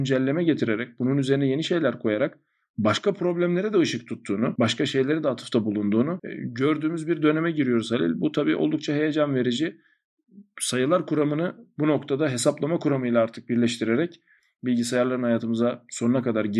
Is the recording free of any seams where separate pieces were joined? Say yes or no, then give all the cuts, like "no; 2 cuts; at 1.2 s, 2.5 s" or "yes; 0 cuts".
yes; 0 cuts